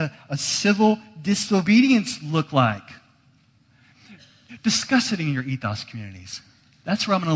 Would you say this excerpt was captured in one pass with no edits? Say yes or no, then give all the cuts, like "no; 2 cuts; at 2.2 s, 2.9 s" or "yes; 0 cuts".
yes; 0 cuts